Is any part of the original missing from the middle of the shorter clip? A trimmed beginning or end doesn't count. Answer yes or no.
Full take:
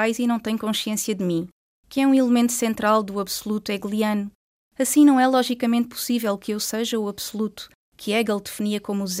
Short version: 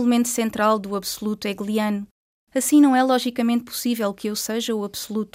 no